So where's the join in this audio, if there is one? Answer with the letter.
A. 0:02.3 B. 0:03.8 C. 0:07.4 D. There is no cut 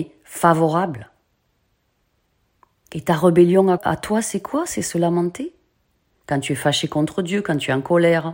B